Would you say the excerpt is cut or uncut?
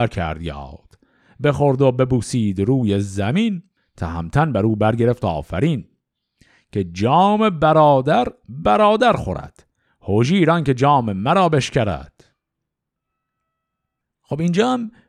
uncut